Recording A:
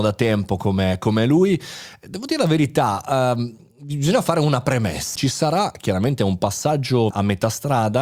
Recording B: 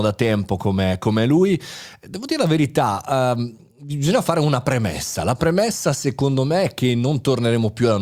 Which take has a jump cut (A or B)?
A